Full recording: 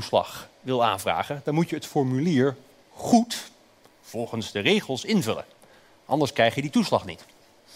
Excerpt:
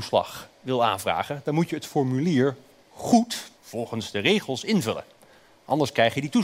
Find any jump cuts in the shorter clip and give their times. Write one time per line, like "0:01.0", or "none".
0:03.6

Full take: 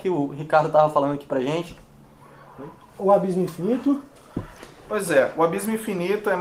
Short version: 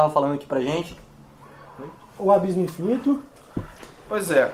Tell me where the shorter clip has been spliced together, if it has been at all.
none

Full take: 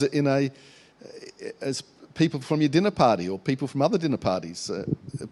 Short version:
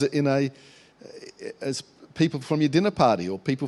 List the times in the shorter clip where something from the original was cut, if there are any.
none

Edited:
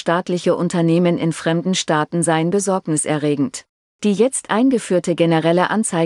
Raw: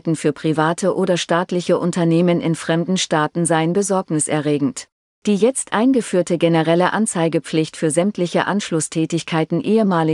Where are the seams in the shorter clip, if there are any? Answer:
none

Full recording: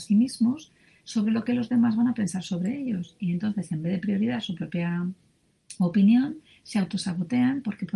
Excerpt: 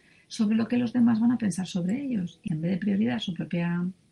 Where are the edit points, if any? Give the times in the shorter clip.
0:02.5

